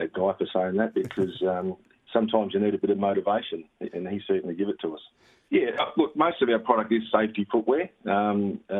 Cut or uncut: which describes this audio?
cut